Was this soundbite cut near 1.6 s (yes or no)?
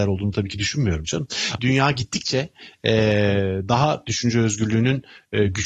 yes